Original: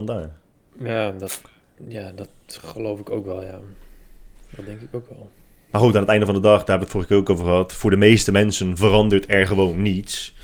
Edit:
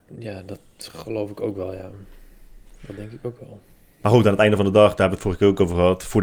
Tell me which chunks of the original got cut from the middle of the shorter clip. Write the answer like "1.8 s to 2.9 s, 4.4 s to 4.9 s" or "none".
none